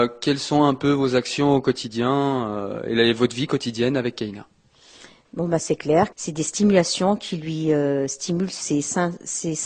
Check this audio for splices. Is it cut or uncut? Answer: cut